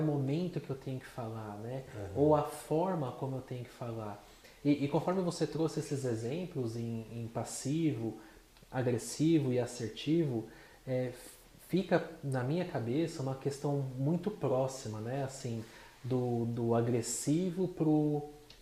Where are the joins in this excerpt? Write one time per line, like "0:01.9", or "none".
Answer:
none

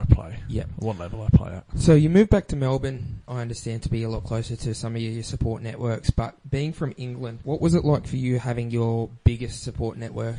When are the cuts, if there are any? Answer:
none

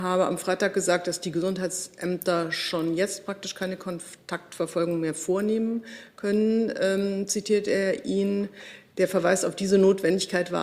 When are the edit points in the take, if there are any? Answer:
none

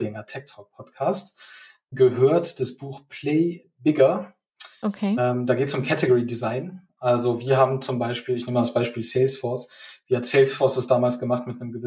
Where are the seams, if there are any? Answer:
none

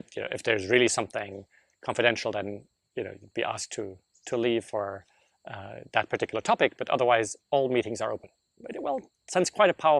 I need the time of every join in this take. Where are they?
none

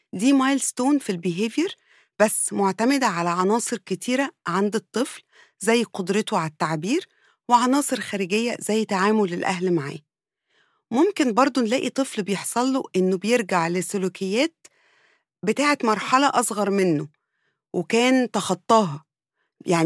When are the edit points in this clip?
none

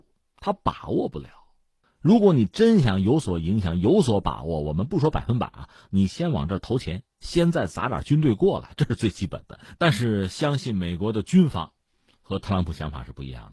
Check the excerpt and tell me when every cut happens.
0:09.8

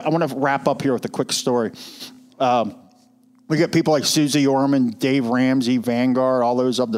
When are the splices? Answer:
none

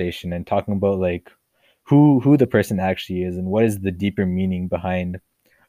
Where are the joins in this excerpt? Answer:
none

